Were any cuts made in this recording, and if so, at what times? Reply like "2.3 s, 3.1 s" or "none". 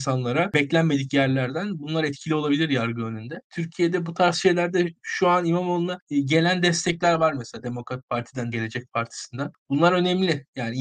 8.5 s